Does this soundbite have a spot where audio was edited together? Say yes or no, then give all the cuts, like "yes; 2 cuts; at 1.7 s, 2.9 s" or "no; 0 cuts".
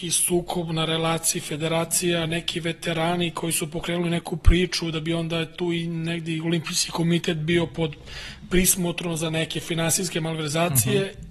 no; 0 cuts